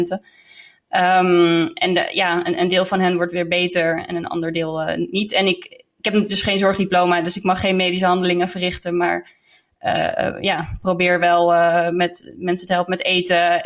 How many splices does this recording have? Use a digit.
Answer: 0